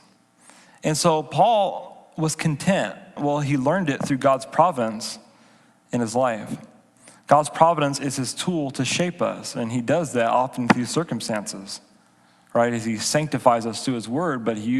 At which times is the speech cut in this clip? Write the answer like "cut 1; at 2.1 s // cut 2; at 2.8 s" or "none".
cut 1; at 3.2 s